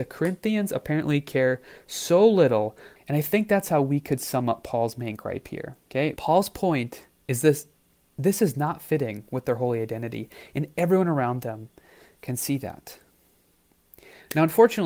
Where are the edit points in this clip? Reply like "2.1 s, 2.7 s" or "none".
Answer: 3.0 s, 6.2 s